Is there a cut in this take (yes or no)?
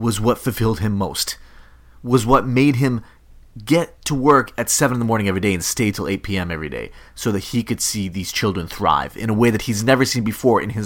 no